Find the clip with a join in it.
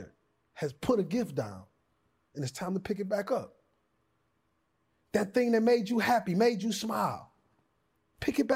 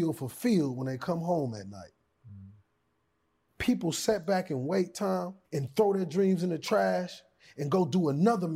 second; 2 cuts; at 3.5 s, 5.4 s

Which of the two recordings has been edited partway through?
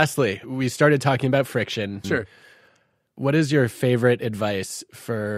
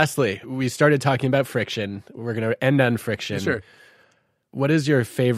first; 1 cut; at 2.0 s

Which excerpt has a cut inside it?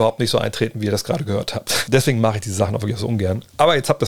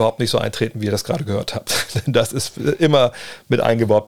first; 1 cut; at 1.9 s

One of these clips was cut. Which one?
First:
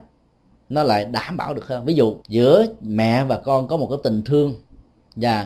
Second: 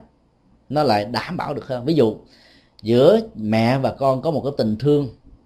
first; 1 cut; at 2.2 s

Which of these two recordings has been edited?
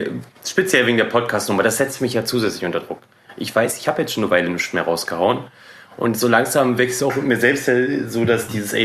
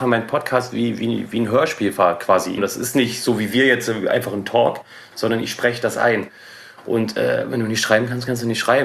second; 1 cut; at 2.6 s

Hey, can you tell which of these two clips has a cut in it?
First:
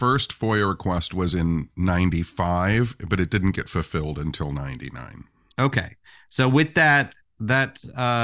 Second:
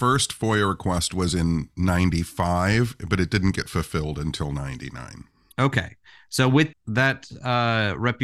second; 1 cut; at 6.7 s

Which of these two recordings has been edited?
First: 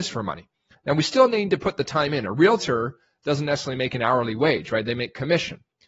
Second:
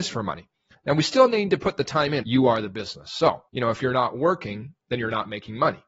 second; 2 cuts; at 2.2 s, 3.5 s

